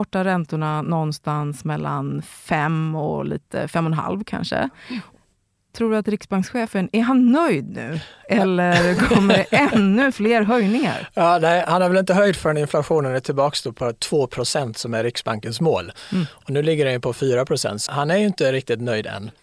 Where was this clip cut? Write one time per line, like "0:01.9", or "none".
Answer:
0:11.6
0:17.9